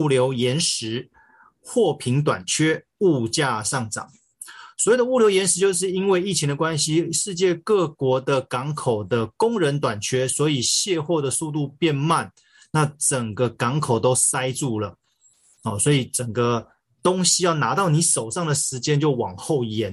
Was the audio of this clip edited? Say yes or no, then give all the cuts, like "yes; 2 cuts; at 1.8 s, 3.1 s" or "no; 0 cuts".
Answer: no; 0 cuts